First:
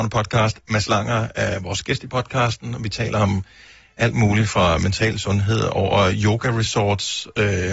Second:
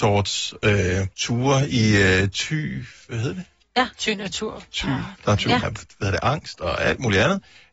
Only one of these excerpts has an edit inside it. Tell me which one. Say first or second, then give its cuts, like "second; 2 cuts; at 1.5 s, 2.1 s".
second; 3 cuts; at 1.1 s, 3.6 s, 5.6 s